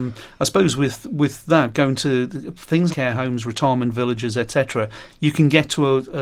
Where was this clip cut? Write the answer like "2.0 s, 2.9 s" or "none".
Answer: 2.9 s

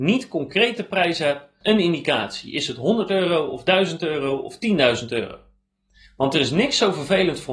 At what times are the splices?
1.6 s

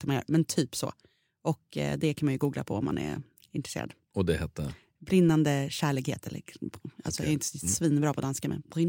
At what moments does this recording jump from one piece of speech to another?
none

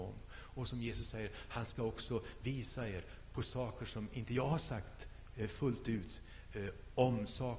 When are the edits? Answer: none

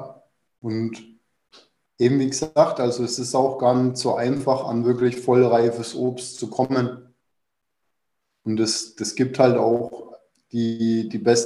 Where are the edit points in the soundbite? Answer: none

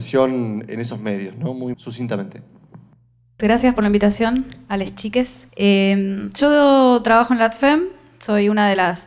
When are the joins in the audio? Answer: 1.7 s, 3.4 s, 5.5 s

